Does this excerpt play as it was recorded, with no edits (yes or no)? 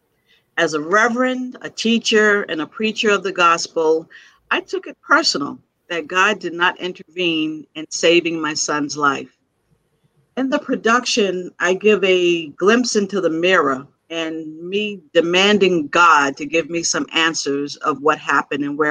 no